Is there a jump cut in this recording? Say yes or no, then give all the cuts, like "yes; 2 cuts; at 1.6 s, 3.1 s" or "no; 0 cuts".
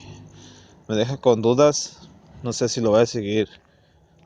no; 0 cuts